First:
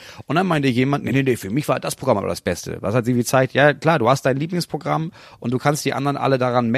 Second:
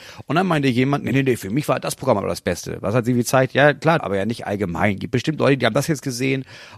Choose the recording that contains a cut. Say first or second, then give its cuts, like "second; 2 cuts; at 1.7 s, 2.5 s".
second; 1 cut; at 4.0 s